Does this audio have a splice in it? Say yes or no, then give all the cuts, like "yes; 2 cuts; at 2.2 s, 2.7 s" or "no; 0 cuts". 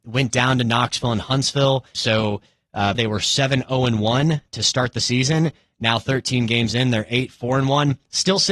yes; 2 cuts; at 1.9 s, 2.9 s